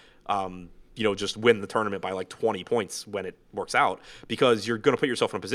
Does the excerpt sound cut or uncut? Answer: uncut